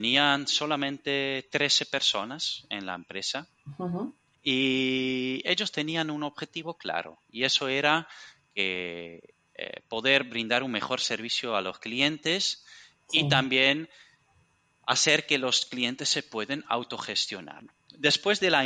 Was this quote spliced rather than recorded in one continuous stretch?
yes; 1 cut; at 17.6 s

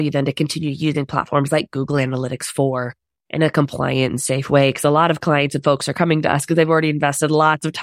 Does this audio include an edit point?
no; 0 cuts

